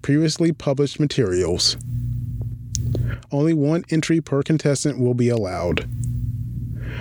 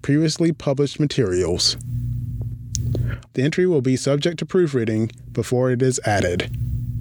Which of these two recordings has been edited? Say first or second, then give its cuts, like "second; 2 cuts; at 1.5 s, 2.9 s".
second; 1 cut; at 3.3 s